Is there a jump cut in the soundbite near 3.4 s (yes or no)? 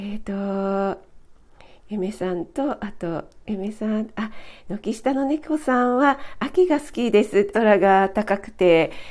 yes